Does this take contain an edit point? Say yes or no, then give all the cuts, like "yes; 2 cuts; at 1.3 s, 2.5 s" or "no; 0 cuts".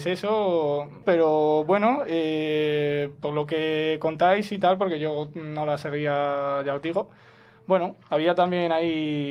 yes; 1 cut; at 1.0 s